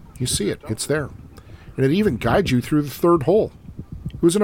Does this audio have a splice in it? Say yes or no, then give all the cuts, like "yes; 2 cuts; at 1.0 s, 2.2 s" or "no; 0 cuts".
no; 0 cuts